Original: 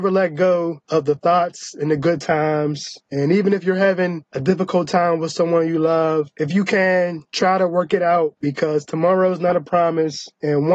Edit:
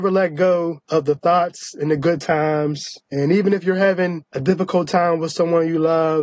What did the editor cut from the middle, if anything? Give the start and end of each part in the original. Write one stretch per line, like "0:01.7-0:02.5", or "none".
none